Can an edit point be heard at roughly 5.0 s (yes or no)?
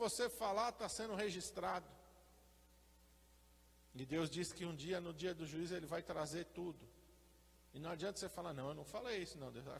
no